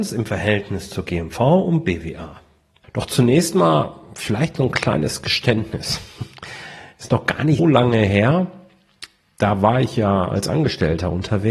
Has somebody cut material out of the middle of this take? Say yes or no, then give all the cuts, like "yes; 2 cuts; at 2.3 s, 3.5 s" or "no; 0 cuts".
yes; 2 cuts; at 2.8 s, 7.6 s